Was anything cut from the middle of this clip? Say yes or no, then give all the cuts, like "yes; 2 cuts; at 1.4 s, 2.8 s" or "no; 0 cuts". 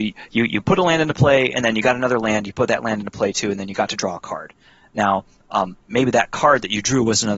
no; 0 cuts